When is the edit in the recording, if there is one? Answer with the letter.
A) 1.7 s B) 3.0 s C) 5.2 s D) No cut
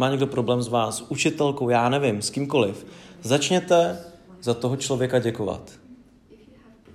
D